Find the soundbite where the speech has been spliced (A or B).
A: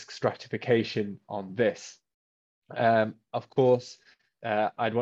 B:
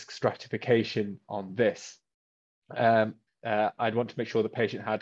B